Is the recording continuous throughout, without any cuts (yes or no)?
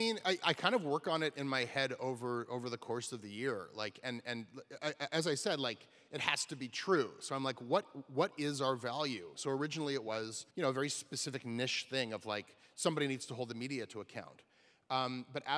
no